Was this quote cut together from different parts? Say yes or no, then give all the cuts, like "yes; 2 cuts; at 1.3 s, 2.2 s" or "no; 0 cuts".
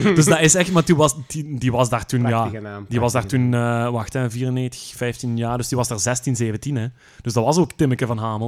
no; 0 cuts